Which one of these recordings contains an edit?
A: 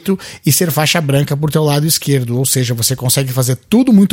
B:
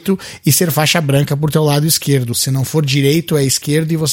B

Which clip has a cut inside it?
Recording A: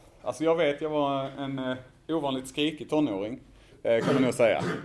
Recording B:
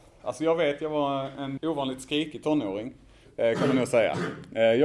B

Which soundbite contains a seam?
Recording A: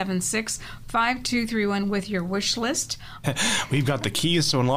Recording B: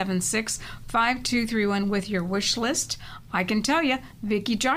A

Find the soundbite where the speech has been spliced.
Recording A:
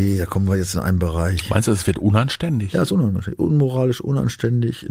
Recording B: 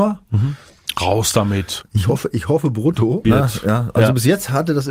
B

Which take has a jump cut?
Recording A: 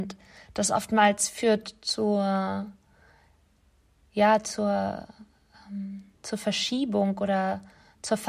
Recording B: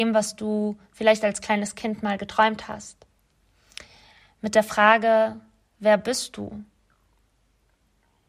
A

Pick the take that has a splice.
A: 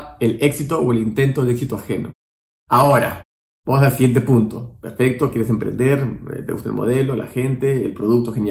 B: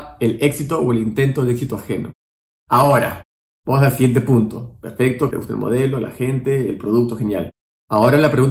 B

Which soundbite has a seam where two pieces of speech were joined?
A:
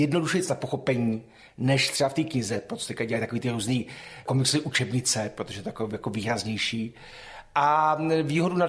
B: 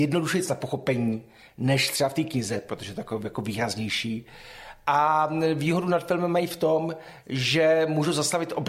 B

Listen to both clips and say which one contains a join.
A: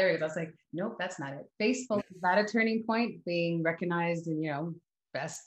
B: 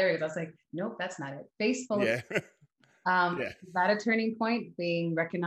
A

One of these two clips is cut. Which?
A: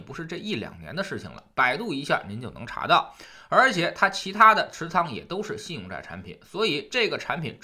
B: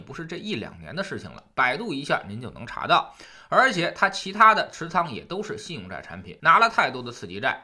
B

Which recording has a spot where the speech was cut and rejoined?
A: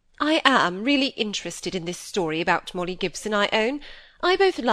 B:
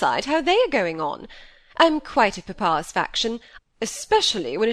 B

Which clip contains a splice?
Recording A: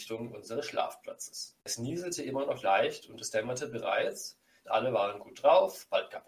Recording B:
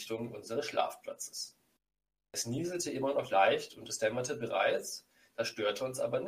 A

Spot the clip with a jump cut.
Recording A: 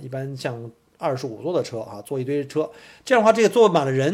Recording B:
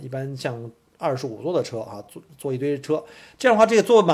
A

